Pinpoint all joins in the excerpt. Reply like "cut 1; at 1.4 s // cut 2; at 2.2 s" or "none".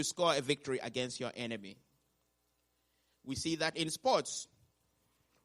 cut 1; at 3.7 s